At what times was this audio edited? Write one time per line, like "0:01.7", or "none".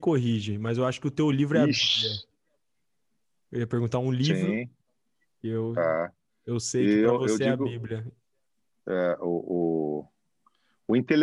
none